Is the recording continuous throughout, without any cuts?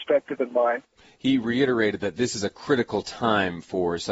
yes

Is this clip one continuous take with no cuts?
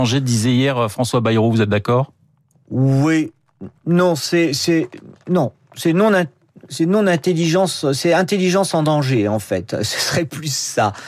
no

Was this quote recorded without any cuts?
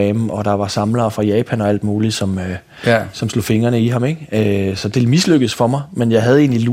yes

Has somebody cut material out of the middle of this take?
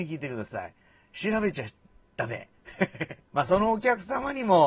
yes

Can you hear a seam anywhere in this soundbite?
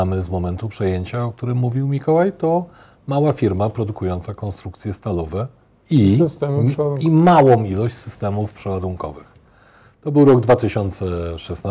no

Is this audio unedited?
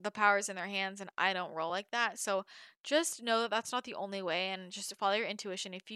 yes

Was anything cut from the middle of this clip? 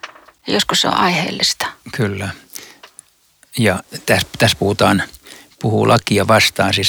no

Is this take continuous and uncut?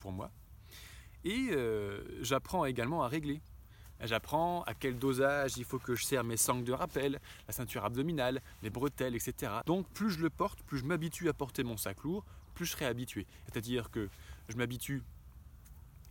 no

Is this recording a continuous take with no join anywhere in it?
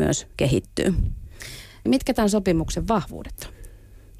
no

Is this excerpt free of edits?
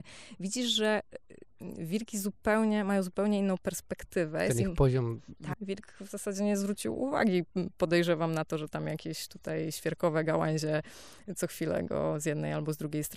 no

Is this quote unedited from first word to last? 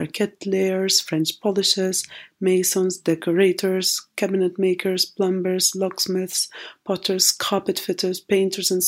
yes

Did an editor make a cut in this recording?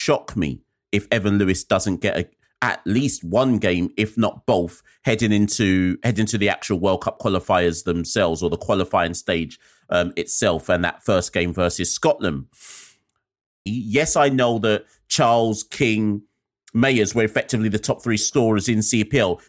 yes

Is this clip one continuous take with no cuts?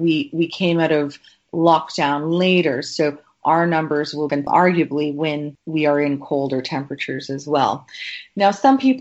no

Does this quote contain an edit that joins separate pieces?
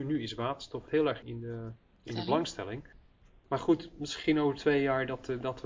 yes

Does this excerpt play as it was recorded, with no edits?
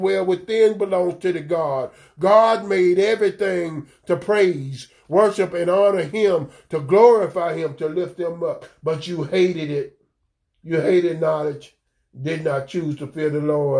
yes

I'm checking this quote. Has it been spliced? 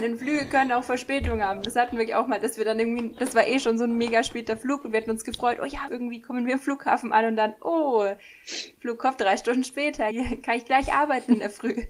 yes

